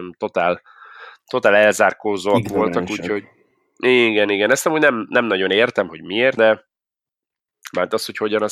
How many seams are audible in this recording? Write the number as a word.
one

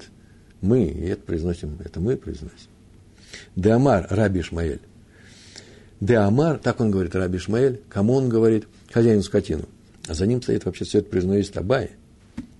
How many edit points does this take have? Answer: one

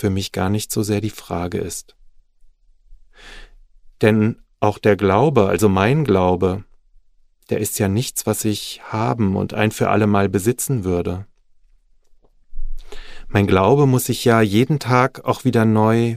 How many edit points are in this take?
zero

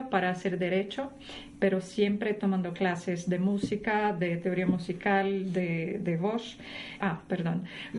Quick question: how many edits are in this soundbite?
one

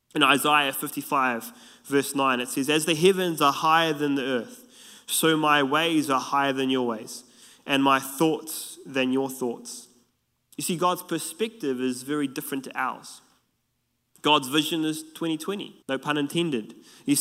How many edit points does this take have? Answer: one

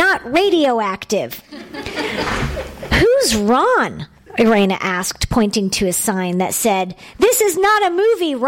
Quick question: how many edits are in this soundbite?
zero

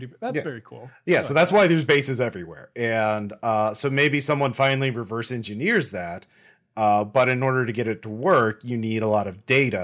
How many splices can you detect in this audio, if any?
zero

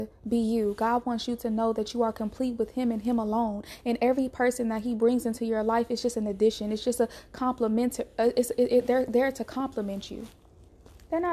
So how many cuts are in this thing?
zero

